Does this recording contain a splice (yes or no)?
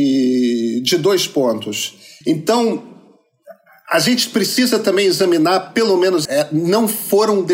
yes